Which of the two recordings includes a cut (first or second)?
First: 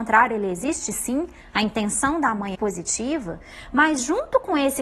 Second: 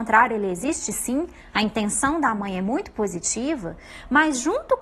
first